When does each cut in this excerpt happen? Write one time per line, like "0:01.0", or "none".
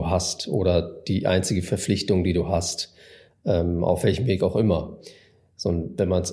none